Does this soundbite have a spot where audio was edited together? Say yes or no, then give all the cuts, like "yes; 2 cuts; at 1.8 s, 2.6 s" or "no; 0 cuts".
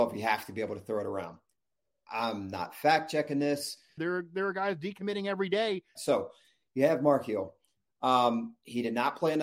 yes; 2 cuts; at 4.0 s, 6.0 s